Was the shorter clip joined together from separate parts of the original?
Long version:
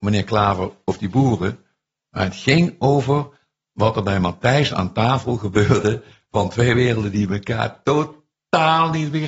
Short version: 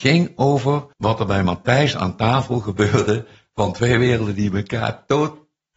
yes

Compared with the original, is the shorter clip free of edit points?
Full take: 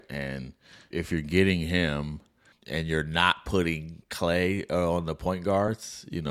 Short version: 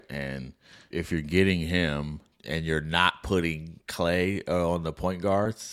no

